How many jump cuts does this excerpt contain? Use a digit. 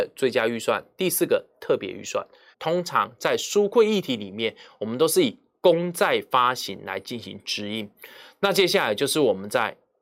2